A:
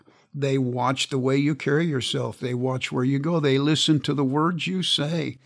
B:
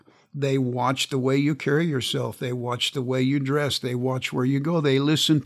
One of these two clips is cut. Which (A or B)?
A